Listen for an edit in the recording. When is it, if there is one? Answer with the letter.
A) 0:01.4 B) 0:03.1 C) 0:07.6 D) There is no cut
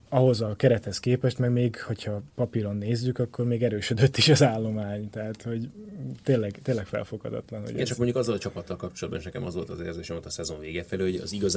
D